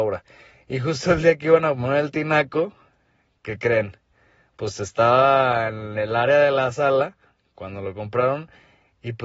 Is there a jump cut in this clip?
no; 0 cuts

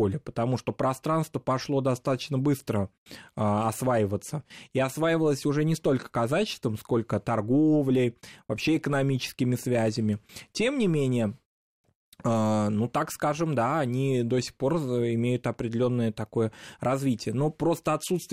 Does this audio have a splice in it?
no; 0 cuts

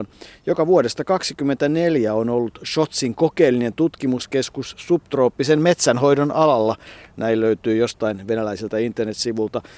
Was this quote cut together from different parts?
no; 0 cuts

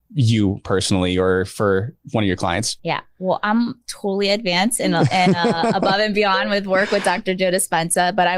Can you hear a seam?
no; 0 cuts

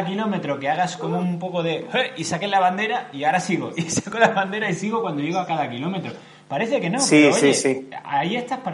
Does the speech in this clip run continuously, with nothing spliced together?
yes; 0 cuts

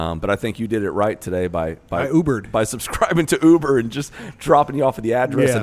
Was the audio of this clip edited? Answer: no; 0 cuts

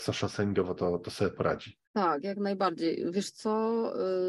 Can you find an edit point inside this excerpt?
yes; 1 cut; at 1.8 s

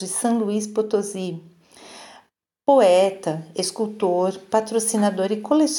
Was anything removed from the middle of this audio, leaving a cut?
no; 0 cuts

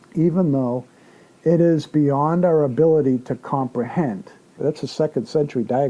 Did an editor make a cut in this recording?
yes; 1 cut; at 4.6 s

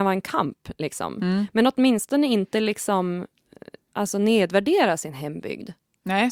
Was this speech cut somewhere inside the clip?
no; 0 cuts

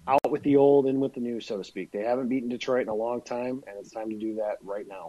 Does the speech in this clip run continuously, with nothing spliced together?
yes; 0 cuts

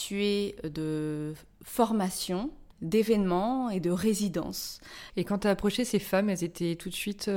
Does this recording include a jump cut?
yes; 2 cuts; at 2.7 s, 5.1 s

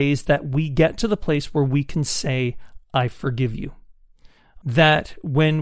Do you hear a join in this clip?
yes; 1 cut; at 4.6 s

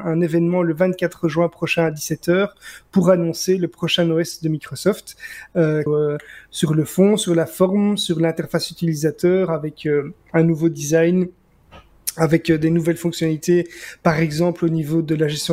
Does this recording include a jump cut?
yes; 1 cut; at 5.9 s

